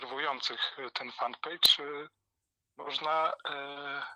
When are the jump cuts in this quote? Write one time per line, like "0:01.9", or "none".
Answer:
none